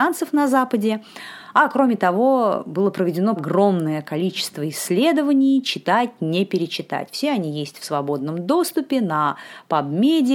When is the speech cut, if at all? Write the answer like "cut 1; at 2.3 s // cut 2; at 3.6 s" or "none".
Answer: cut 1; at 3.4 s